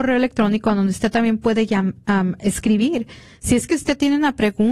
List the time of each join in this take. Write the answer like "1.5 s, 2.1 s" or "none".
none

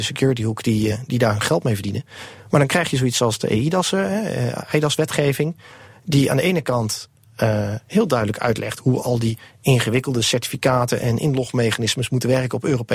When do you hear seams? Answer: none

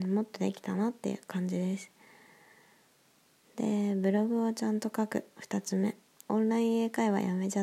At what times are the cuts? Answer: 6.3 s

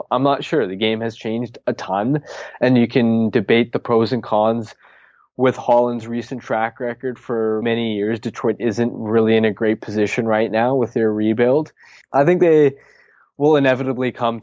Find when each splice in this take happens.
7.6 s, 12.0 s

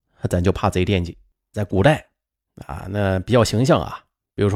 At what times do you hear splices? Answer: 1.5 s

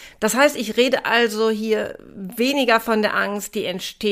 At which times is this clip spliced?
none

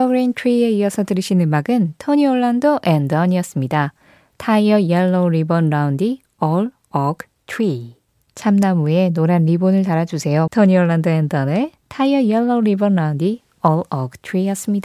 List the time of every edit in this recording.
10.5 s

